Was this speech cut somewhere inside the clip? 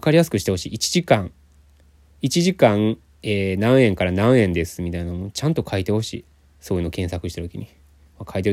no; 0 cuts

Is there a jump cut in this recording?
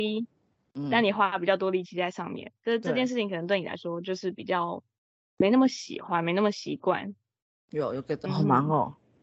yes; 1 cut; at 8.2 s

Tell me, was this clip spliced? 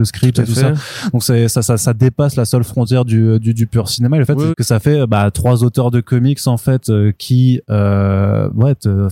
yes; 1 cut; at 4.5 s

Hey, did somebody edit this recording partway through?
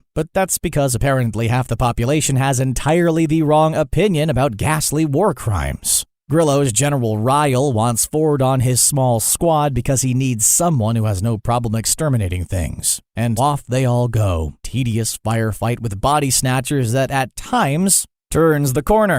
yes; 2 cuts; at 13.4 s, 14.6 s

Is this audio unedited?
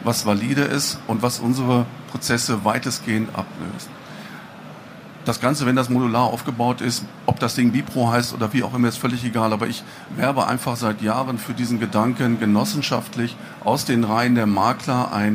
yes; 0 cuts

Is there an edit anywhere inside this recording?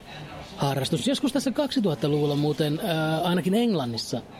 no; 0 cuts

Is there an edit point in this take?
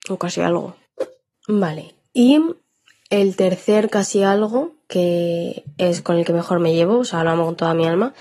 no; 0 cuts

